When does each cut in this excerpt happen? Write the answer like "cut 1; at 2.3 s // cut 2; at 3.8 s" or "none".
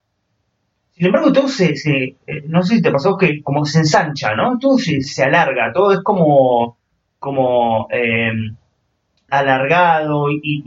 cut 1; at 5.0 s // cut 2; at 9.3 s